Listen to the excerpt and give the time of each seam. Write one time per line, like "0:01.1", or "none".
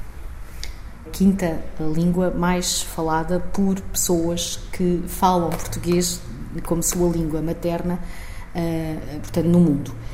0:01.1